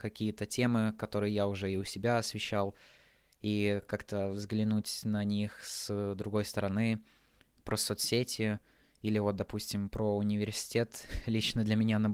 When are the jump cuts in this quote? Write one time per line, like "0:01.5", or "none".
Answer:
none